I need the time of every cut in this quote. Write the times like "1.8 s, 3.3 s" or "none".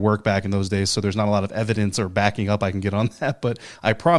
none